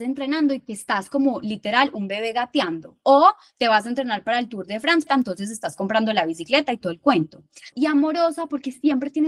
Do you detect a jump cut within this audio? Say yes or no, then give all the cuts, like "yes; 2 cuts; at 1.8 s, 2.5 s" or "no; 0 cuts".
yes; 2 cuts; at 5.1 s, 7.7 s